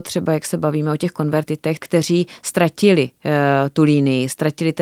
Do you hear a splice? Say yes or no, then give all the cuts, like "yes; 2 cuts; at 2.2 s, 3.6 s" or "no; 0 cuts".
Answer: yes; 1 cut; at 1.8 s